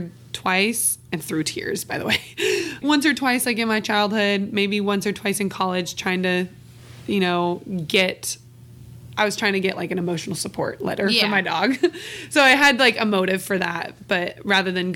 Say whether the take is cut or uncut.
cut